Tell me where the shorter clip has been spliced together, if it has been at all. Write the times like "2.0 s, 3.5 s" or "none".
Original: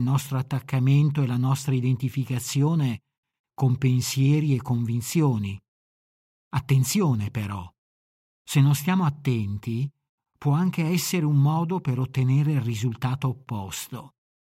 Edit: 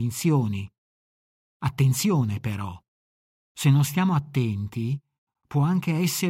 none